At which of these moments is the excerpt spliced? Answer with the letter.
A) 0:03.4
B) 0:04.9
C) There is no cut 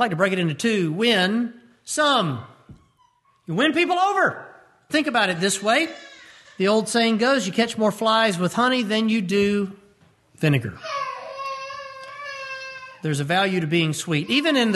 B